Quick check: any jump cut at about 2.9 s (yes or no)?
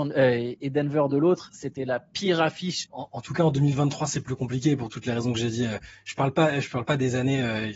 yes